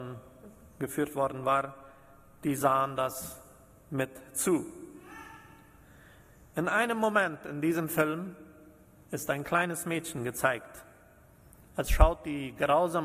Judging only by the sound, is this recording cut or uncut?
uncut